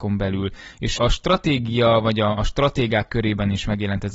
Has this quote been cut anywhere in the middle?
yes; 1 cut; at 1.0 s

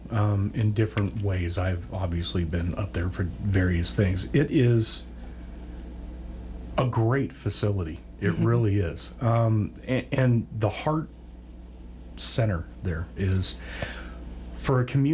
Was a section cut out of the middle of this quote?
yes; 1 cut; at 13.2 s

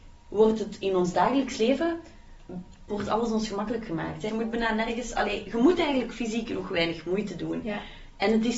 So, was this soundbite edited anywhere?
yes; 1 cut; at 4.3 s

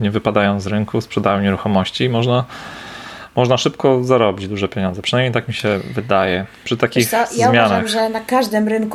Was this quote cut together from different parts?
no; 0 cuts

